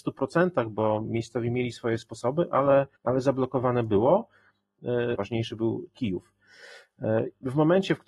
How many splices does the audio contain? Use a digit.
2